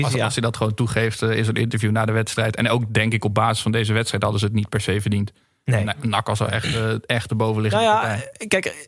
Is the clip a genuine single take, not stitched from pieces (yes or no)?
yes